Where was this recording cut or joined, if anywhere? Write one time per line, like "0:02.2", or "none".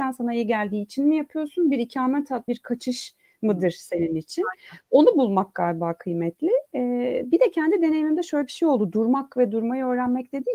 0:02.5